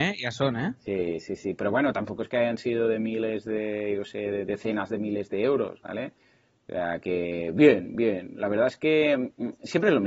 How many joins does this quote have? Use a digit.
0